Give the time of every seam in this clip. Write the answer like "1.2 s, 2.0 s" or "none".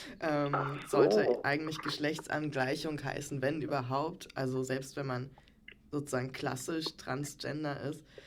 none